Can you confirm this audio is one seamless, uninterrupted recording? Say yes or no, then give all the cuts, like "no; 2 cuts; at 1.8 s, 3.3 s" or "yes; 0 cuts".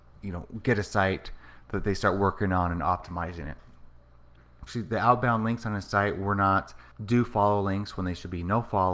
no; 2 cuts; at 4.7 s, 6.9 s